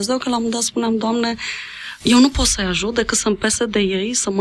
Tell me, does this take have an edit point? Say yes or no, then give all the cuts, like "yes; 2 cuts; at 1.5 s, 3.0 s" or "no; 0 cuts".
no; 0 cuts